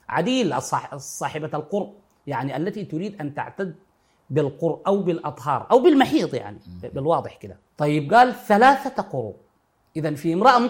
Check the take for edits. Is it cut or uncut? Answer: cut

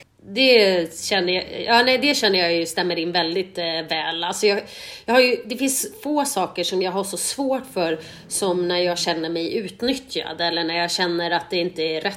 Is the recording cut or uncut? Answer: uncut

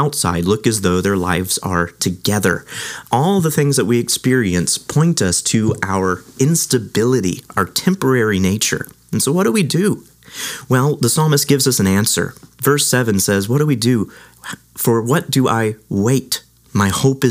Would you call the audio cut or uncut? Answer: uncut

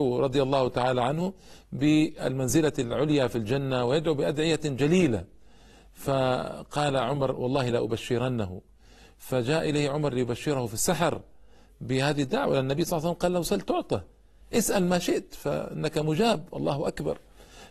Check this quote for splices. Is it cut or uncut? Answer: uncut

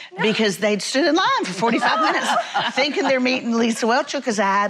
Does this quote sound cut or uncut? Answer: uncut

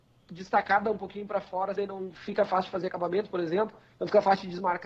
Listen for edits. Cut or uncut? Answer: cut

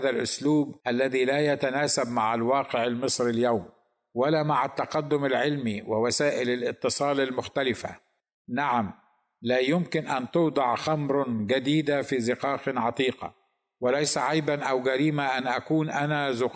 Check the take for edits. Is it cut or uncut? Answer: uncut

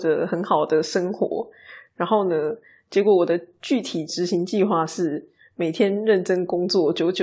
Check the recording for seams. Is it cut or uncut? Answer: uncut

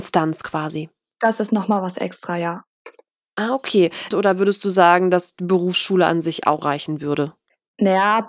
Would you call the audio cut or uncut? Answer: cut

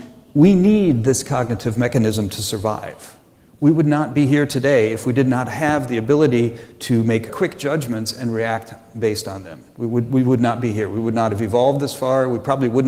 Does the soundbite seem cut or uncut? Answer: cut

